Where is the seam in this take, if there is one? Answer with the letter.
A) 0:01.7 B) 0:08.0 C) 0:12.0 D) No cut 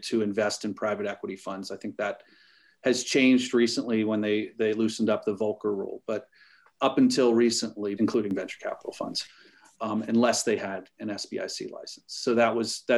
B